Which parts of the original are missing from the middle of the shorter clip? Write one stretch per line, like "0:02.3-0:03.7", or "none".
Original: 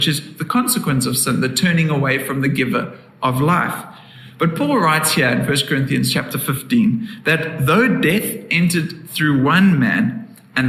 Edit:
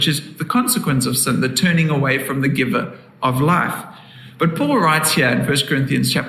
none

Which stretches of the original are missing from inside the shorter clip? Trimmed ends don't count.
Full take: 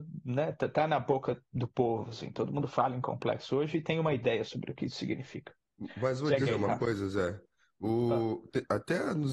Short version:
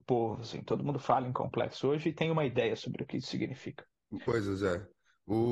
0:05.9-0:06.8

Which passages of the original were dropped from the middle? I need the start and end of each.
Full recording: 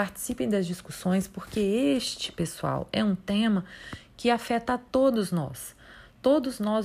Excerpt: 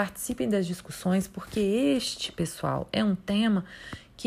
none

